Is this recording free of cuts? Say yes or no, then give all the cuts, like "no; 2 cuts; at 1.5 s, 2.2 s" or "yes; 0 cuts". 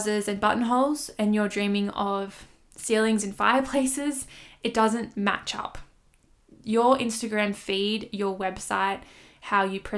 yes; 0 cuts